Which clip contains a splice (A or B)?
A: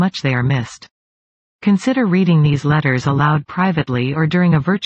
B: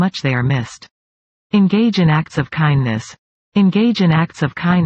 B